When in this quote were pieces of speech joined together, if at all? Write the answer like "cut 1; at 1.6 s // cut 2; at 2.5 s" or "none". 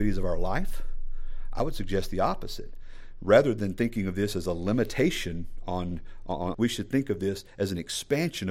cut 1; at 6.5 s